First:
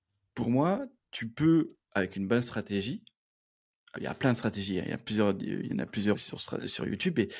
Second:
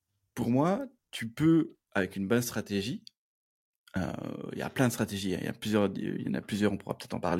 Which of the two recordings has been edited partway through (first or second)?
first